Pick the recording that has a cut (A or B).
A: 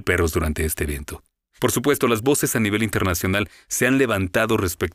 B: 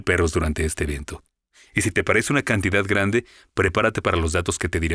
A